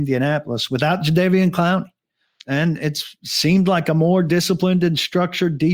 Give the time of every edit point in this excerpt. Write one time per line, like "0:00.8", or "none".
0:02.4